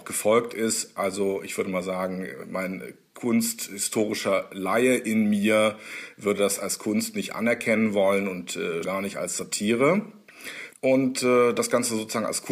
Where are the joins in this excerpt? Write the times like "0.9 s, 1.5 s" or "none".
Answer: 8.8 s, 10.7 s